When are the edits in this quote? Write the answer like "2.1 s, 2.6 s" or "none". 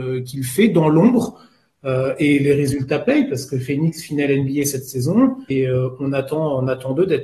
5.5 s